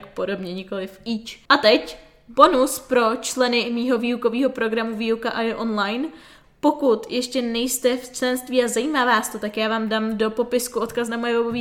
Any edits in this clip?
yes; 1 cut; at 1.5 s

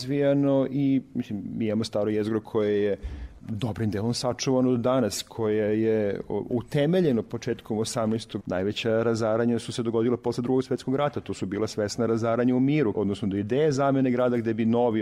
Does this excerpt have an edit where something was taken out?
yes; 2 cuts; at 8.4 s, 12.9 s

